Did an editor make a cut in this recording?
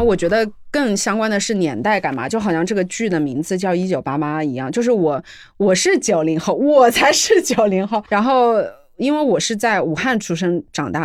no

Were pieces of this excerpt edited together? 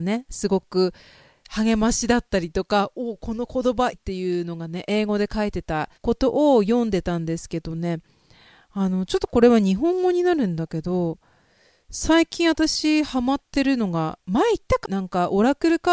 yes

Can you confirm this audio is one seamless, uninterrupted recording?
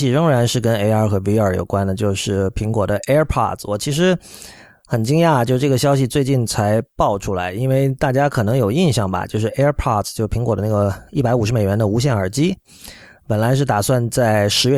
yes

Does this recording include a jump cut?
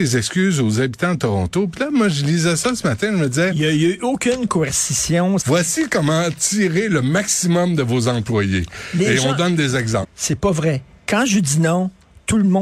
yes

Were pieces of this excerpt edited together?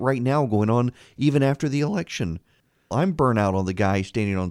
yes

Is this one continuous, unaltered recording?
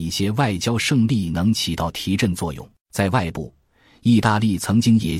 no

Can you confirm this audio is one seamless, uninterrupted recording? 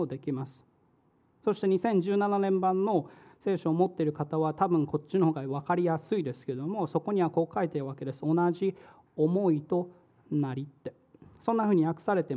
yes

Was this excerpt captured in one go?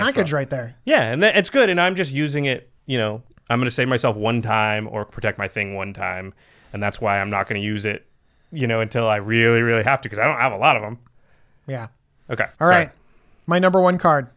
no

